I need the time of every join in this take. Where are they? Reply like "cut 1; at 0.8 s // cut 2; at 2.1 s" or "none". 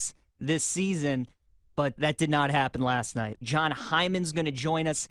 cut 1; at 2.0 s // cut 2; at 3.4 s